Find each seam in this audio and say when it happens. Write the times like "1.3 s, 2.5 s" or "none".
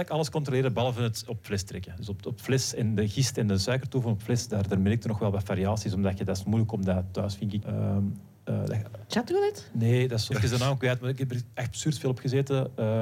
7.6 s, 10.3 s